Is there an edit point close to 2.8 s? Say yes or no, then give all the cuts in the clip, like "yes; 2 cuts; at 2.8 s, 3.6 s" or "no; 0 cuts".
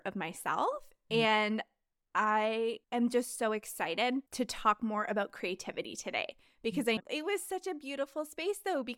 yes; 3 cuts; at 2.8 s, 4.3 s, 7.0 s